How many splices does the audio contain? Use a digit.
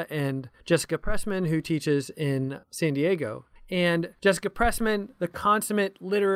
0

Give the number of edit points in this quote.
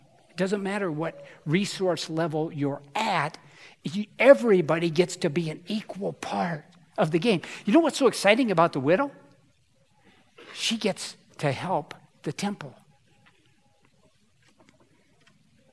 0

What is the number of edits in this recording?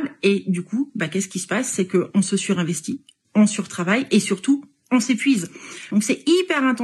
1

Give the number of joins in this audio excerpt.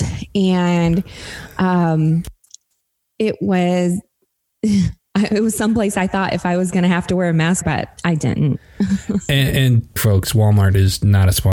2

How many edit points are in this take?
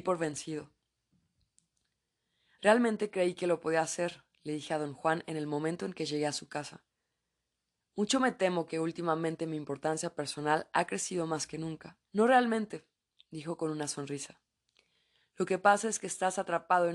1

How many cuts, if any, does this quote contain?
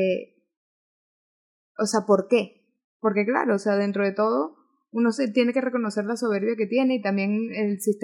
1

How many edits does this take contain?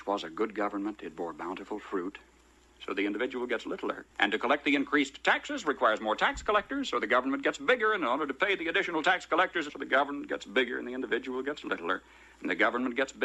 3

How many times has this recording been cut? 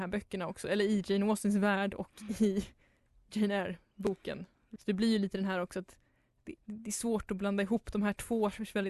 2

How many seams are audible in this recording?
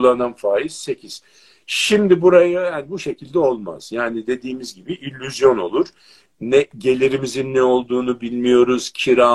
1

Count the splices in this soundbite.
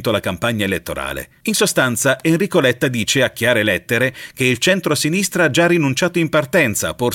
0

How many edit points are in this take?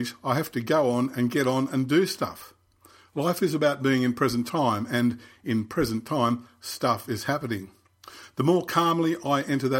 0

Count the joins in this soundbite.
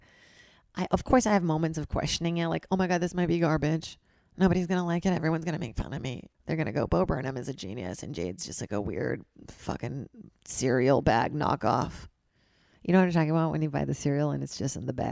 1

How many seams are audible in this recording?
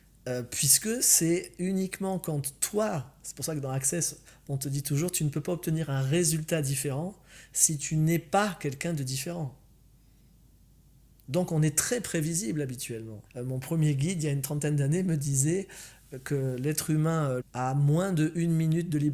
2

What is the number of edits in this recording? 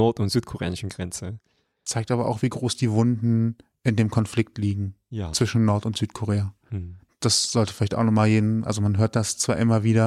0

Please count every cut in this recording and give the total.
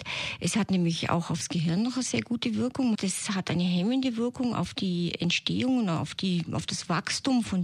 1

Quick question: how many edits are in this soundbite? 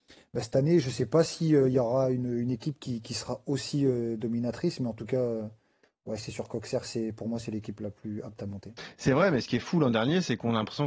0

